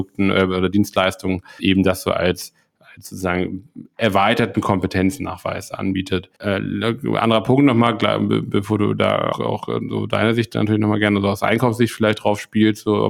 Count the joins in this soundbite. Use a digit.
3